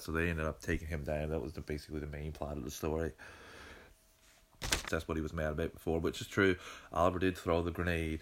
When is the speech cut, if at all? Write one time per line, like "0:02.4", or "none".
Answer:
0:04.8